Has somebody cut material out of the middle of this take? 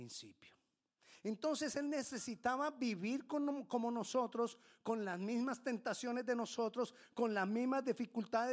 no; 0 cuts

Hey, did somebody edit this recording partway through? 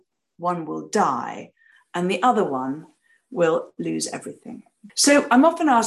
yes; 1 cut; at 4.9 s

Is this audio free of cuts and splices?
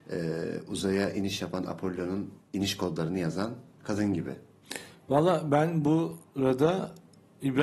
yes; 0 cuts

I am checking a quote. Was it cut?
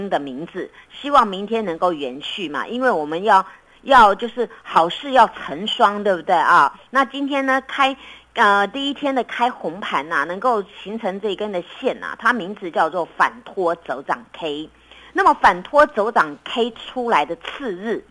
no; 0 cuts

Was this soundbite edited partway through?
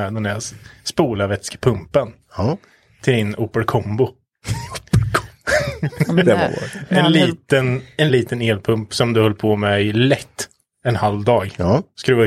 yes; 1 cut; at 8.1 s

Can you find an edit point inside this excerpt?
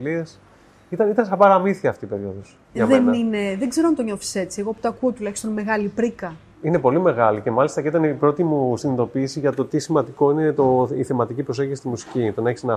no; 0 cuts

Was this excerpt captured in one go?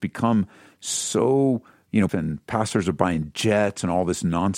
no; 1 cut; at 2.1 s

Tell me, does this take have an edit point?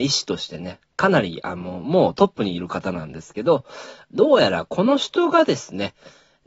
no; 0 cuts

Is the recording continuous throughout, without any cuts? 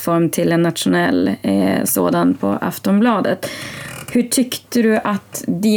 yes; 0 cuts

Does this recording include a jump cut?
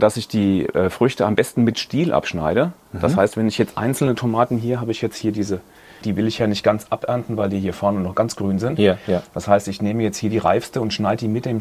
yes; 1 cut; at 6.0 s

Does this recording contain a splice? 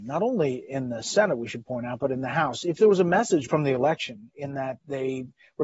no; 0 cuts

